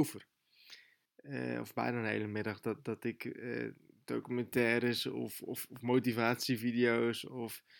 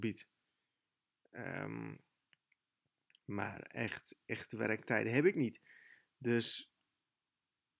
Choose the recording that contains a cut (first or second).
first